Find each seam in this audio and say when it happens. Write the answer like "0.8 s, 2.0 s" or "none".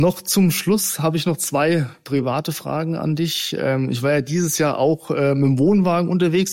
none